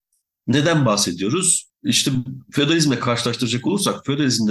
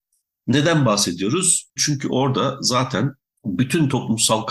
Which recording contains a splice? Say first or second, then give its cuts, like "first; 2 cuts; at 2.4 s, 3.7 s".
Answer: second; 1 cut; at 1.8 s